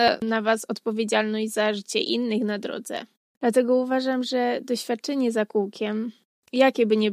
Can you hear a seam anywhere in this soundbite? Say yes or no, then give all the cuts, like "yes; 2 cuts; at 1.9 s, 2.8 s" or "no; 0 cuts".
yes; 1 cut; at 3.3 s